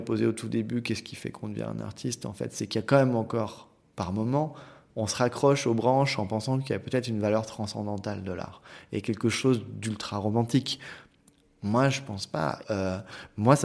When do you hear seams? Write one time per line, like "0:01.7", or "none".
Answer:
0:11.5
0:12.6